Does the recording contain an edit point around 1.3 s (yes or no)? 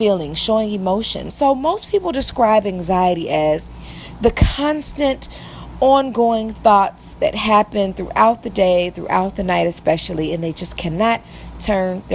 yes